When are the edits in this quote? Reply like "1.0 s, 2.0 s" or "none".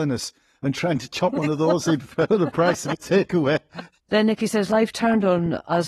2.3 s, 4.0 s